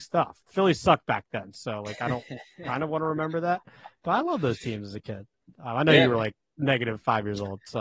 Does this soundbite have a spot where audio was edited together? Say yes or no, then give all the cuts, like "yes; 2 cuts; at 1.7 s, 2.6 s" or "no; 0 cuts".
no; 0 cuts